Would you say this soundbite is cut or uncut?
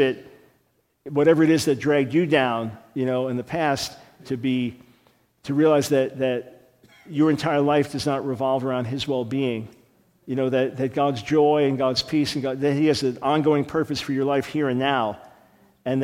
cut